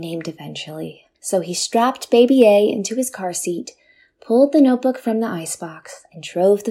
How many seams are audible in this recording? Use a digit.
1